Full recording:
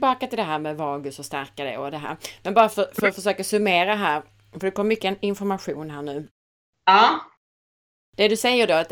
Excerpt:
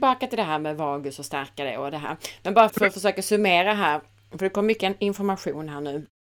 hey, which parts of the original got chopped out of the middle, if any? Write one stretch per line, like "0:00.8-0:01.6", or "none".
0:02.7-0:02.9